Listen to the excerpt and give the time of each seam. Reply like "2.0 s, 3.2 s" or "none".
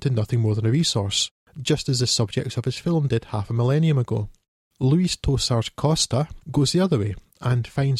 6.4 s